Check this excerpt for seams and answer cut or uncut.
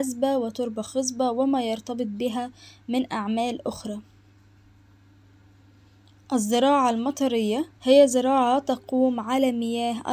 cut